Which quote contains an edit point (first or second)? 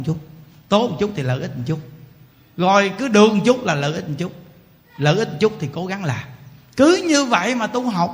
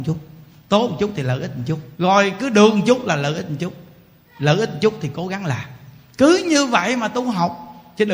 second